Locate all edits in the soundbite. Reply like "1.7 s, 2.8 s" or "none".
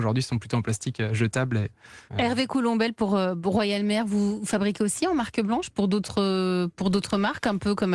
2.1 s